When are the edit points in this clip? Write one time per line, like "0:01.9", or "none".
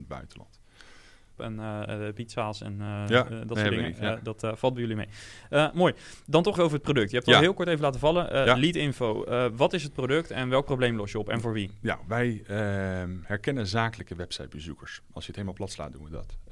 0:01.4
0:06.6